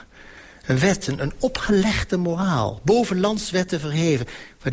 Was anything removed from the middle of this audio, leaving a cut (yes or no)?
no